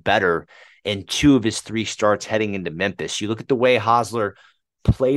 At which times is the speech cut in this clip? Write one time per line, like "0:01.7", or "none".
none